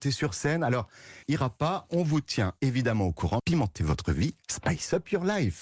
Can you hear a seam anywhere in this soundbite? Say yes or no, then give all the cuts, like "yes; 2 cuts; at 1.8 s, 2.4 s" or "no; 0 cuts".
yes; 2 cuts; at 1.2 s, 3.4 s